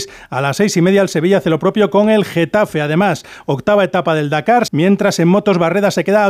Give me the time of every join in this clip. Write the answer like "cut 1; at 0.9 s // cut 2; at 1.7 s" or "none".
cut 1; at 4.7 s